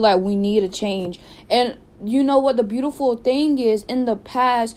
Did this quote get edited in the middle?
no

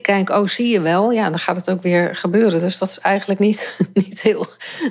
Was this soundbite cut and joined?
no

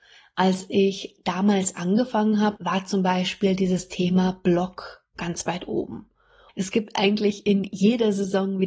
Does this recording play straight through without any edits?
no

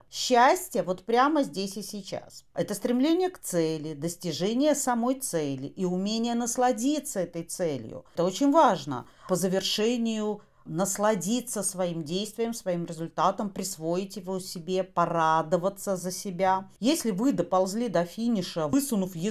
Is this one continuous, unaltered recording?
yes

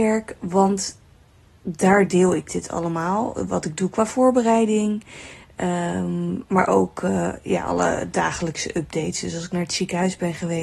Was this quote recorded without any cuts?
yes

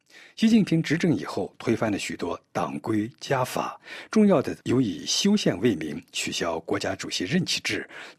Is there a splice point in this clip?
no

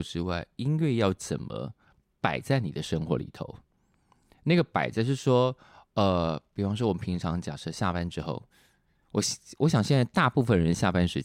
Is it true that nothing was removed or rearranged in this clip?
yes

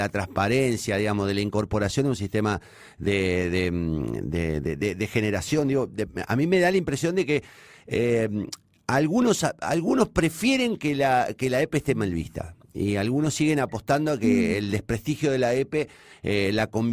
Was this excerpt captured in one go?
yes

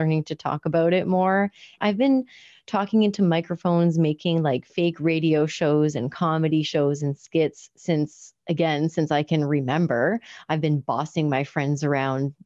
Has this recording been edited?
yes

